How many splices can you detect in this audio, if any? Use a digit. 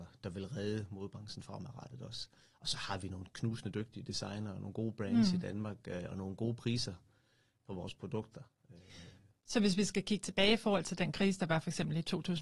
0